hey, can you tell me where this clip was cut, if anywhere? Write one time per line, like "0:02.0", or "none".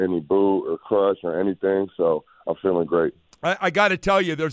none